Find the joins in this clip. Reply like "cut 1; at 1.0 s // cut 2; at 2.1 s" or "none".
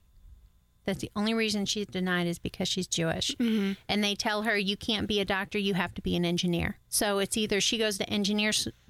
cut 1; at 6.8 s